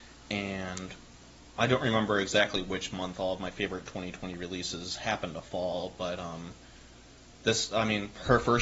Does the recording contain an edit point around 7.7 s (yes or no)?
no